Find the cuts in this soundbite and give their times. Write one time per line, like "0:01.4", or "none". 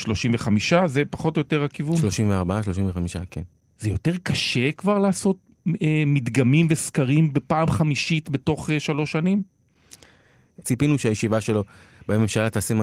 0:10.6